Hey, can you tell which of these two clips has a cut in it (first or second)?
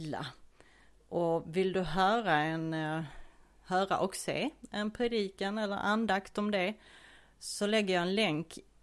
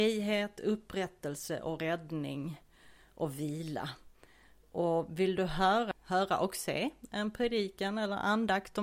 second